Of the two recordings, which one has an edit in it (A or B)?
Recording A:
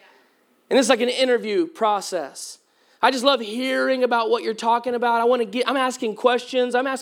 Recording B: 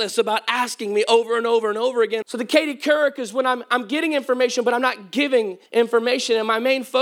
B